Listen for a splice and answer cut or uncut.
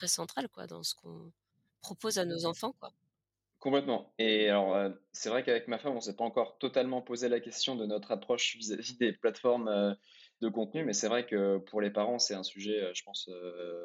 uncut